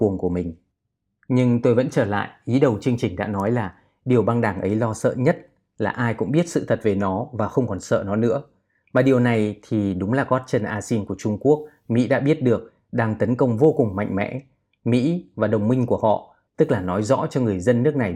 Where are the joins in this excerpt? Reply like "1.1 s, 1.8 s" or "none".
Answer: 16.5 s

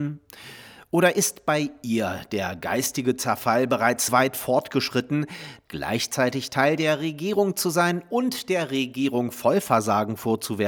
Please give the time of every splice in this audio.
4.1 s, 5.7 s

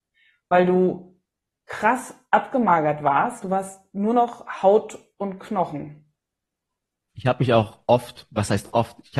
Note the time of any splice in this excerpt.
none

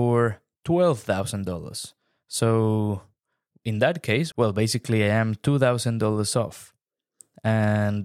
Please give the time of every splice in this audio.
4.3 s

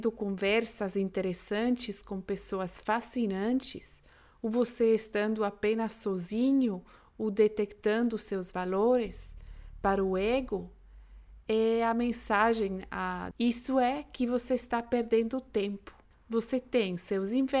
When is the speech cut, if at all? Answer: 13.3 s, 16.1 s

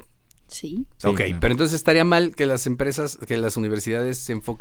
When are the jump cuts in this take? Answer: 1.0 s

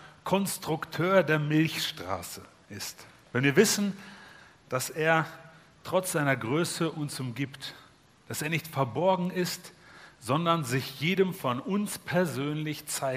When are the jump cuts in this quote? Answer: none

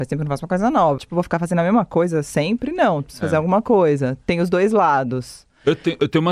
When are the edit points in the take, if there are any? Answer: 1.0 s

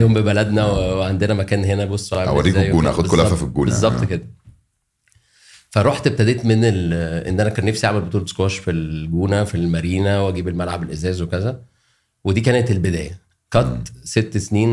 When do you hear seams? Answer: none

